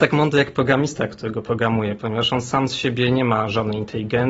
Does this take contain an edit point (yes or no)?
no